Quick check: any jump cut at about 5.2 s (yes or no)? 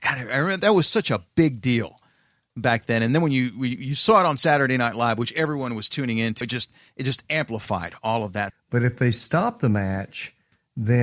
no